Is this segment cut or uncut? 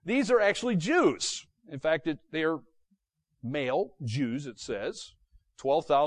uncut